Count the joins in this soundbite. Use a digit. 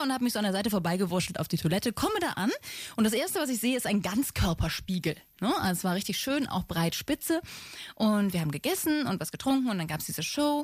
1